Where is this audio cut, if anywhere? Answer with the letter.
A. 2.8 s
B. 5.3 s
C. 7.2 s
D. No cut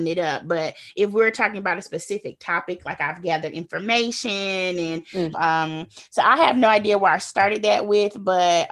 B